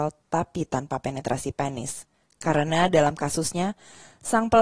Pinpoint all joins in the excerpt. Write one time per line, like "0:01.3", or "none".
none